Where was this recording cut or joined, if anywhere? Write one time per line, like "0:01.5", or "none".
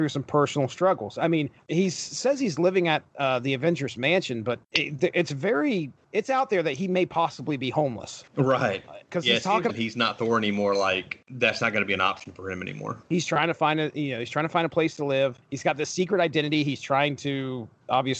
0:09.7